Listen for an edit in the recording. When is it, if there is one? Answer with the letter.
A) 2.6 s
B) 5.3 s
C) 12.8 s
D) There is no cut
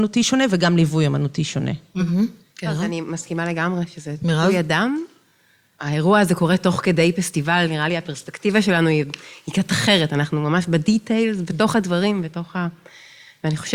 D